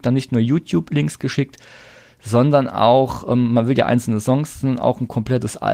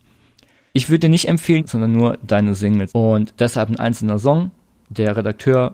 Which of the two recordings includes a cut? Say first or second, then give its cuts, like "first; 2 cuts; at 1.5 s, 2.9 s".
second; 2 cuts; at 1.6 s, 2.9 s